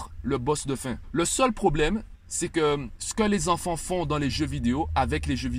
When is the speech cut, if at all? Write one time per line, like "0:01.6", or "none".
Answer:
none